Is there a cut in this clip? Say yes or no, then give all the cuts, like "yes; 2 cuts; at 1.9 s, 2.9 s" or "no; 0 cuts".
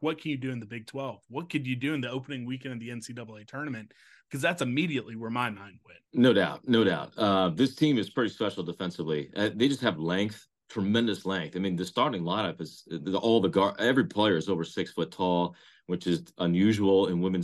yes; 1 cut; at 6.1 s